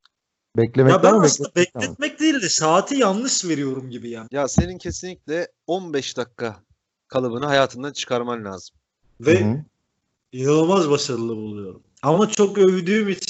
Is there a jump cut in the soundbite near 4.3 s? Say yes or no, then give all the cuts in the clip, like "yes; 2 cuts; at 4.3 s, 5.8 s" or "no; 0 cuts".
yes; 2 cuts; at 4.3 s, 9.0 s